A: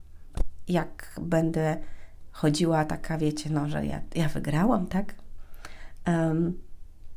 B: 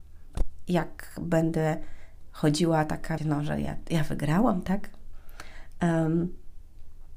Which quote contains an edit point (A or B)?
B